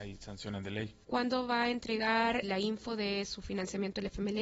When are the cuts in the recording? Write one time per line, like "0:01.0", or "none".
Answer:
0:01.0
0:02.4